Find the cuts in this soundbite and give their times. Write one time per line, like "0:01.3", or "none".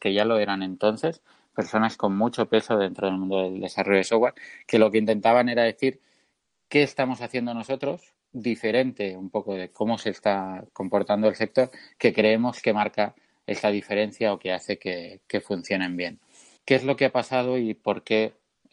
0:16.6